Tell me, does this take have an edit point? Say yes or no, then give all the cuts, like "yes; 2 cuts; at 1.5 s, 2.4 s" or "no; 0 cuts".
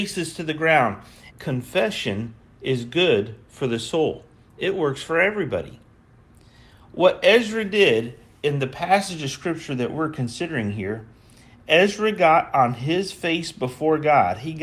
yes; 1 cut; at 1.3 s